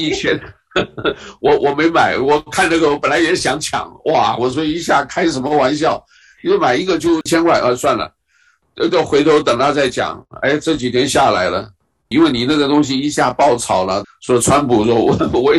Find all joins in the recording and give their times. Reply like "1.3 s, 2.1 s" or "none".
12.1 s, 14.0 s